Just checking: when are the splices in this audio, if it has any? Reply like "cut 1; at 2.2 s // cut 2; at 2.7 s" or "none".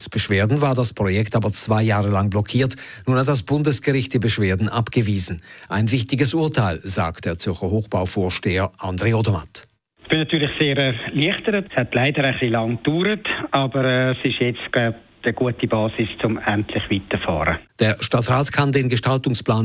cut 1; at 17.7 s